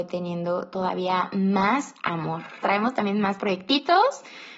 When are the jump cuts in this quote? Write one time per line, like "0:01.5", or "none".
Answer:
0:02.6